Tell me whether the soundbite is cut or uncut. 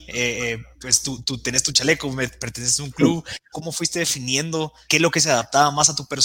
cut